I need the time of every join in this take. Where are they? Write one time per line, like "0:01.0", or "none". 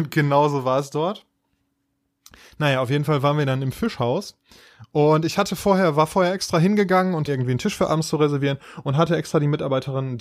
0:07.3

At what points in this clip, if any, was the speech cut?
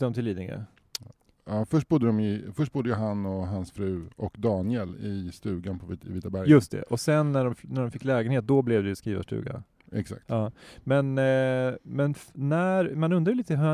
none

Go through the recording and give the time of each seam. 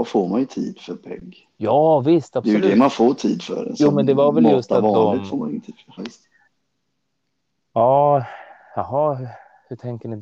0:06.0

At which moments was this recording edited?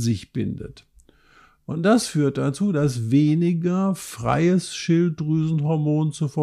none

